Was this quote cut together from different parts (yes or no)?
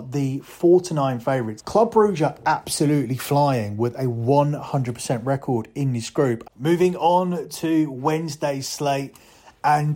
yes